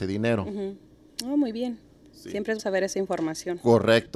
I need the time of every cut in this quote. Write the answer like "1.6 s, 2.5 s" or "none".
2.6 s

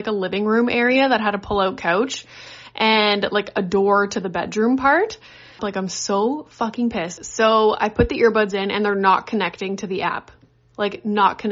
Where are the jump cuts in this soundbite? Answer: 5.6 s, 7.2 s

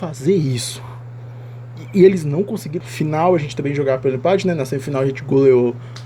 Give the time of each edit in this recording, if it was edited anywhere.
2.8 s

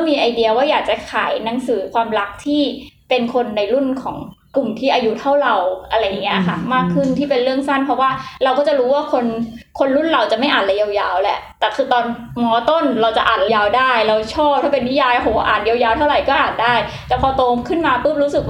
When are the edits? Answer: 13.5 s

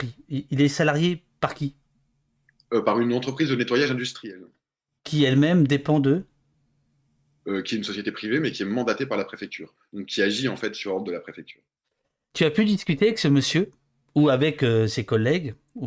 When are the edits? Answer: none

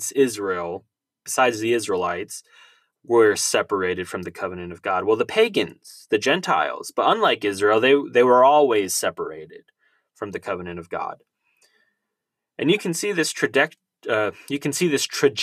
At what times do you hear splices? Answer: none

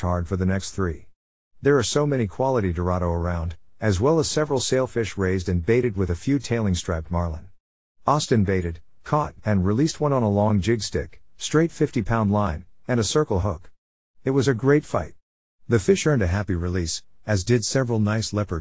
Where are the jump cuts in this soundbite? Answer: none

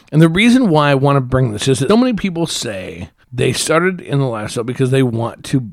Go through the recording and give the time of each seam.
1.9 s, 3.2 s

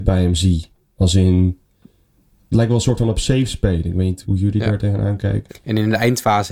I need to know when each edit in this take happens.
4.2 s, 5.5 s

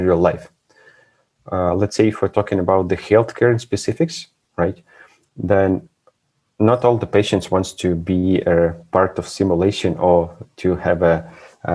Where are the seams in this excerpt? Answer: none

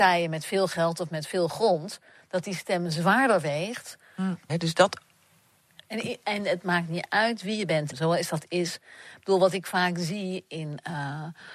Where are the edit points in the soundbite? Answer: 4.5 s, 7.9 s

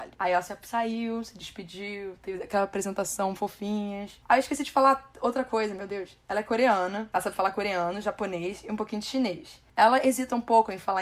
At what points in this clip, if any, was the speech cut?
none

